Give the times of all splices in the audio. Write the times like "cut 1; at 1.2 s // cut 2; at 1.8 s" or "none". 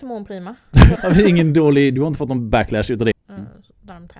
cut 1; at 1.0 s // cut 2; at 3.1 s